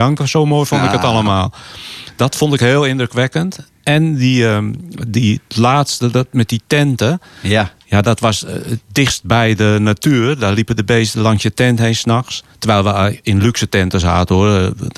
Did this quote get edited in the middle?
no; 0 cuts

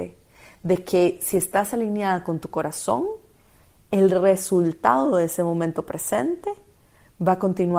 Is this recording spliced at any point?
no; 0 cuts

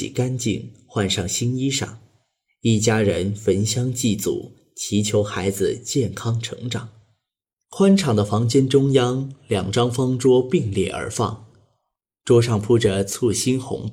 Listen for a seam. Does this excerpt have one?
no; 0 cuts

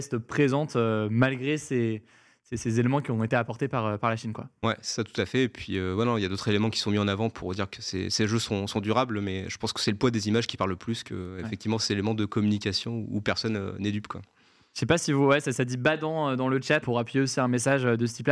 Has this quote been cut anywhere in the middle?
yes; 1 cut; at 16.8 s

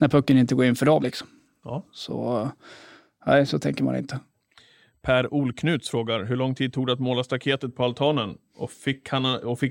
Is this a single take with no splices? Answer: no; 1 cut; at 1.0 s

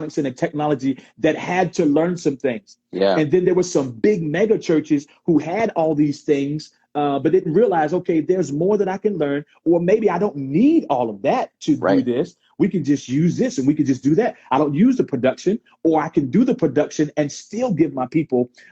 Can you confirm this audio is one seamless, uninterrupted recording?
no; 1 cut; at 14.5 s

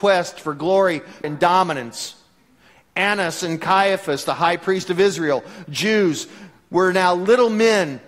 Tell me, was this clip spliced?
yes; 1 cut; at 1.2 s

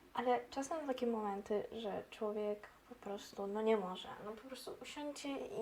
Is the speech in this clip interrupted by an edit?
no; 0 cuts

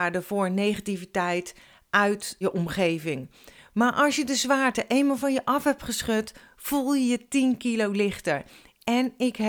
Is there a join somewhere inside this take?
yes; 1 cut; at 2.4 s

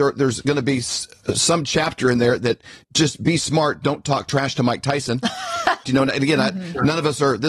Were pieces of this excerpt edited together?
yes; 2 cuts; at 2.8 s, 5.8 s

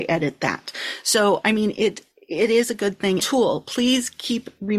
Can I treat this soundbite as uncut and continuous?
no; 1 cut; at 3.2 s

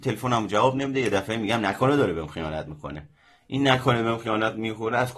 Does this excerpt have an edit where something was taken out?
no; 0 cuts

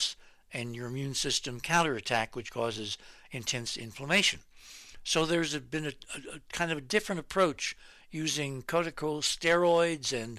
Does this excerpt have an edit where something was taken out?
no; 0 cuts

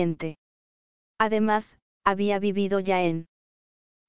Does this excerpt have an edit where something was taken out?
no; 0 cuts

